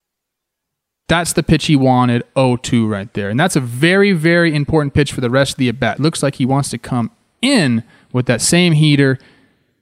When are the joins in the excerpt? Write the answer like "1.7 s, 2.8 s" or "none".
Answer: 6.0 s